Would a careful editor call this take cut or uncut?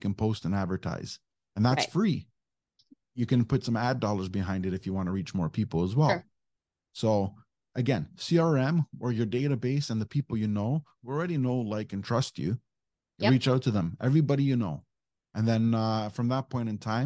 uncut